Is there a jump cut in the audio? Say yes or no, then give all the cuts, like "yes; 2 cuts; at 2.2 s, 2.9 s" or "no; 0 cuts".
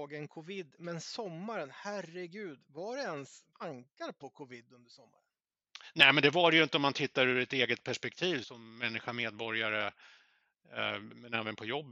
yes; 2 cuts; at 3.5 s, 8.4 s